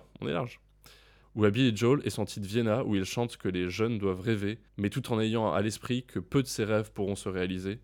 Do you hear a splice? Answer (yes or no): yes